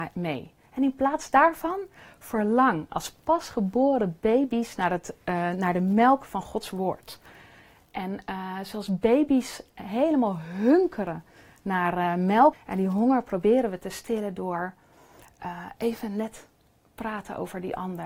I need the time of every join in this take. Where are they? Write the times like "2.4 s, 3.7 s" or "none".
12.5 s